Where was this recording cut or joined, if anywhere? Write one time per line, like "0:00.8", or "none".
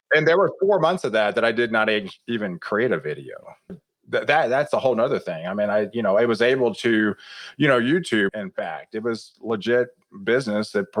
0:03.7
0:08.3